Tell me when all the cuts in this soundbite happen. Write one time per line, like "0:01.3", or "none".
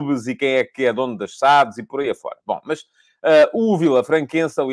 none